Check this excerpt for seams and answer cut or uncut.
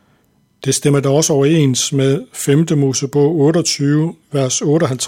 uncut